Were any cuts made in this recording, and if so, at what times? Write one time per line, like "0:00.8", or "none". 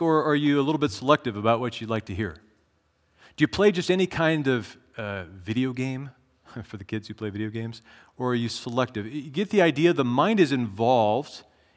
none